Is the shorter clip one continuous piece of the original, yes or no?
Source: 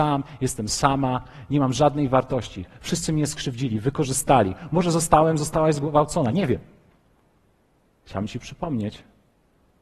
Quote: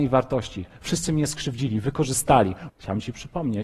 no